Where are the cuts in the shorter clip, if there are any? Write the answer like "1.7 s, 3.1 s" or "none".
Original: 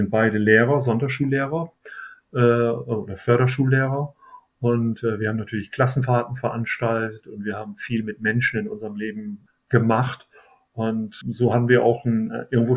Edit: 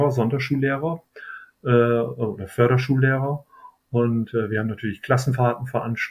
none